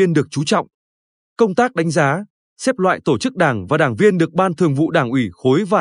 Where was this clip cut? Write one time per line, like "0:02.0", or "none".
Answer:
0:01.2